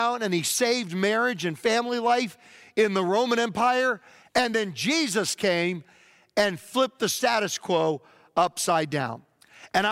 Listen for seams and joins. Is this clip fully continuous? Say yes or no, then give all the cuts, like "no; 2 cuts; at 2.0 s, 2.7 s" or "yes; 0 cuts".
no; 1 cut; at 4.2 s